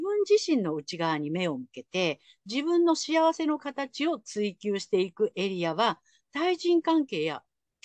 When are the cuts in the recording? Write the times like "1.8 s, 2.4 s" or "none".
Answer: none